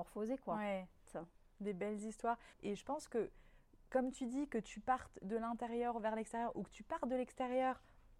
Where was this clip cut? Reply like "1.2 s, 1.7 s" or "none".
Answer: 1.1 s, 2.5 s